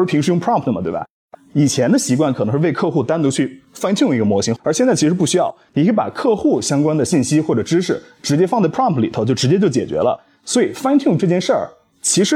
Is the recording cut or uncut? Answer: cut